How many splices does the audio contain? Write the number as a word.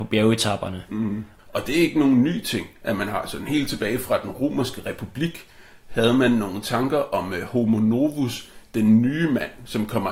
one